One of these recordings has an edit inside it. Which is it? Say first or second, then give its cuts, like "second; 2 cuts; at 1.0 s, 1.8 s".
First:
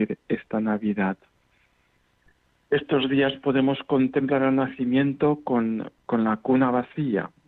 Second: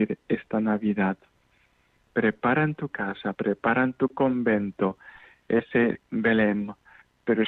second; 2 cuts; at 2.0 s, 3.3 s